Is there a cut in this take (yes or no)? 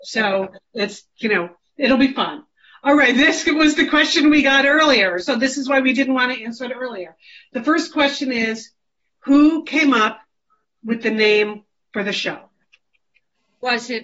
no